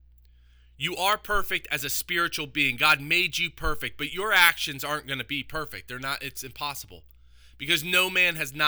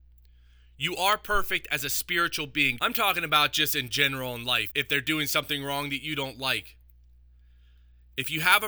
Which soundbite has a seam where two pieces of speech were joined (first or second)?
second